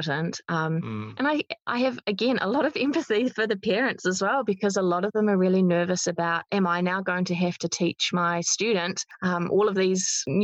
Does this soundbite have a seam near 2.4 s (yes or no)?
no